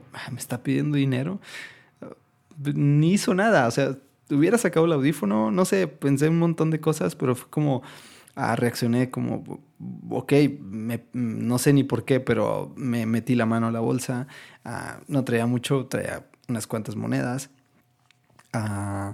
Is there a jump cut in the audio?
no; 0 cuts

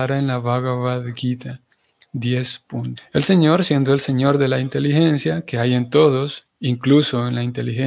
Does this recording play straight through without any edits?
no; 1 cut; at 3.0 s

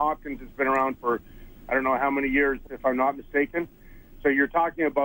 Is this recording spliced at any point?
yes; 1 cut; at 2.7 s

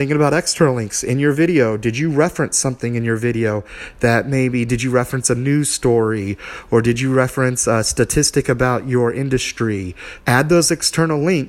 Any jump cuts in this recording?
yes; 1 cut; at 10.2 s

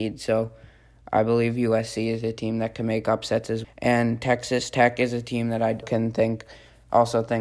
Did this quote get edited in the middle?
yes; 2 cuts; at 3.6 s, 5.8 s

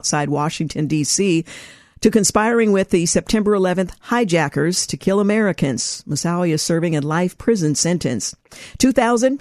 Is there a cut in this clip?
no; 0 cuts

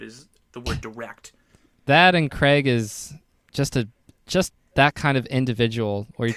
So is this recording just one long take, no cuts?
yes; 0 cuts

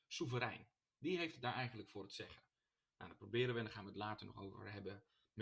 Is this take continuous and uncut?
yes; 0 cuts

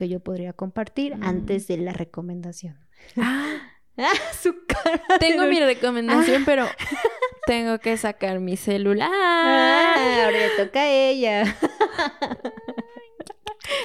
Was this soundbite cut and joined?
no; 0 cuts

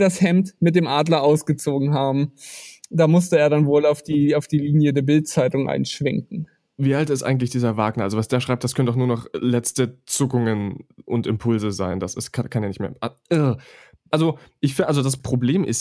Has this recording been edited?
no; 0 cuts

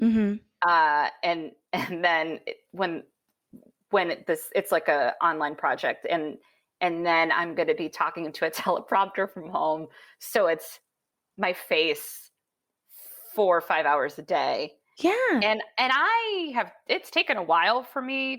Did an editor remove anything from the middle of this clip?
no; 0 cuts

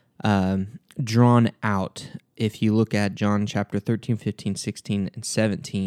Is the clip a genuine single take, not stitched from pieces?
no; 1 cut; at 4.2 s

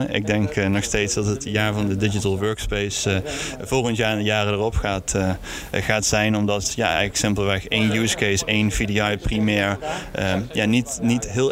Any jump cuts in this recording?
no; 0 cuts

